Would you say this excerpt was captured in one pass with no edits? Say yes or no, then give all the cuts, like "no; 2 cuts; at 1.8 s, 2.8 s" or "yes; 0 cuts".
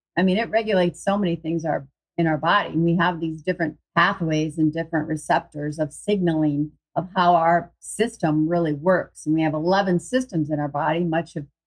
no; 1 cut; at 3.9 s